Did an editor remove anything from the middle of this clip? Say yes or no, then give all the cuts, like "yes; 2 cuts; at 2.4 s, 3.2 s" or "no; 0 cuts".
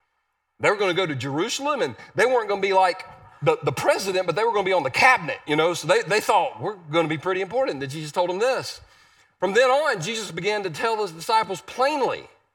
no; 0 cuts